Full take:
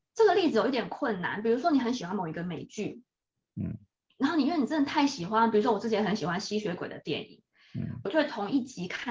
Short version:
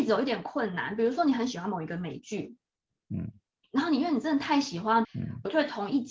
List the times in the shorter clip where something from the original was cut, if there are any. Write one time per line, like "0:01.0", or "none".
0:05.0